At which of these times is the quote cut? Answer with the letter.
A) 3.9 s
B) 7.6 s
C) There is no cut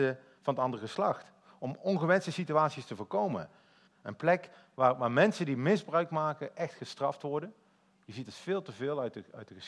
A